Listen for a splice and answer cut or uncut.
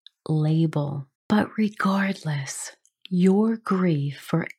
cut